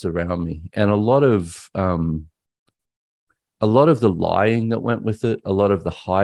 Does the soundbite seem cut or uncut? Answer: uncut